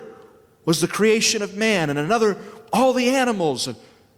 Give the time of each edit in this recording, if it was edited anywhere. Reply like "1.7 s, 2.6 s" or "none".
none